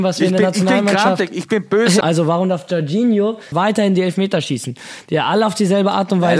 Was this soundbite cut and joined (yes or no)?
yes